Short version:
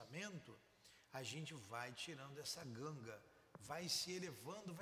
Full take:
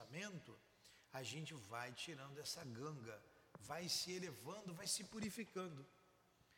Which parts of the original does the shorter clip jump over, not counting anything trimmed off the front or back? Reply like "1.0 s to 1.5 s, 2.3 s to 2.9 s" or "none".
none